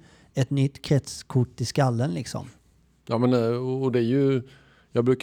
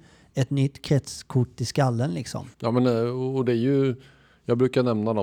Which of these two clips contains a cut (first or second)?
second